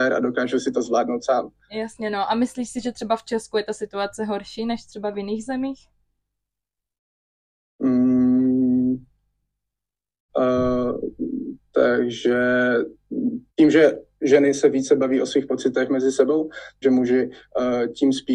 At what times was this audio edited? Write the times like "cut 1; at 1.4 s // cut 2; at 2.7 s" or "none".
cut 1; at 10.3 s // cut 2; at 13.5 s // cut 3; at 16.8 s